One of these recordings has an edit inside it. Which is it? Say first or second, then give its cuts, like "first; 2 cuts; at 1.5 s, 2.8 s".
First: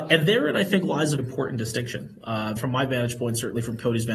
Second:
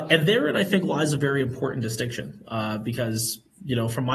first; 2 cuts; at 1.2 s, 2.6 s